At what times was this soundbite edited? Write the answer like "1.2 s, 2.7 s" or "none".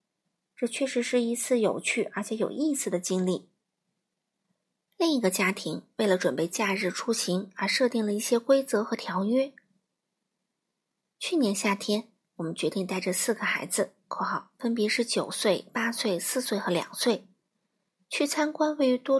none